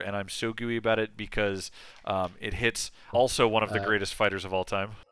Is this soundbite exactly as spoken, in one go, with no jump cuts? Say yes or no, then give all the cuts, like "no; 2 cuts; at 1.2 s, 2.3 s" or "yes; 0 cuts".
no; 1 cut; at 3.1 s